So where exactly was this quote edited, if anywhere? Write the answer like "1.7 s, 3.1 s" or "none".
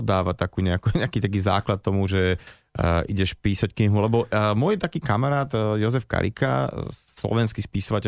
none